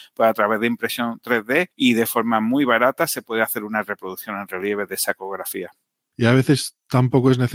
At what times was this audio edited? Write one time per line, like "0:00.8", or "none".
none